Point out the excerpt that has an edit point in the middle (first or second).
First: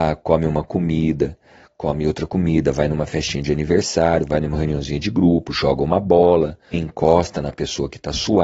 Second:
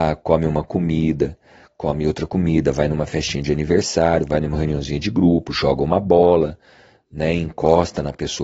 first